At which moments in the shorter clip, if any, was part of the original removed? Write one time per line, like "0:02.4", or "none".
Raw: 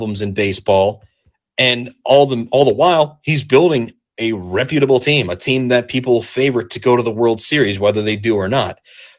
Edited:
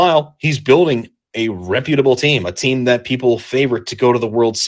none